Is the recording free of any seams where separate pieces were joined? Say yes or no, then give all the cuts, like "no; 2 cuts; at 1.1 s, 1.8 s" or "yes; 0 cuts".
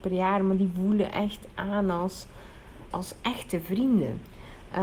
no; 1 cut; at 2.9 s